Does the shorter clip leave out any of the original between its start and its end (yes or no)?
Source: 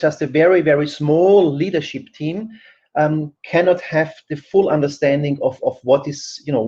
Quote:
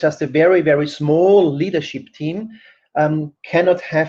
no